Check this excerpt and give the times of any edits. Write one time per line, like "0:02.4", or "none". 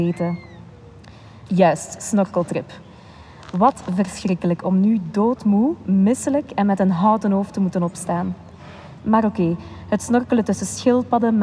0:01.5